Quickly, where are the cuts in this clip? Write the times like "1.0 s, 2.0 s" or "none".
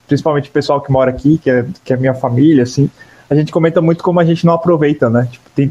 none